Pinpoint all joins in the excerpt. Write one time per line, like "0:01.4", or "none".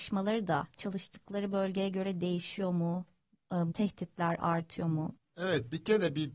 0:03.7
0:05.2